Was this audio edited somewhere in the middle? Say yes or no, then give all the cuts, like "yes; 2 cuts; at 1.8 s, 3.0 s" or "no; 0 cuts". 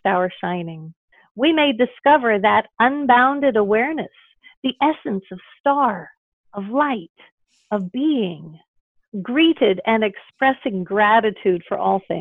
no; 0 cuts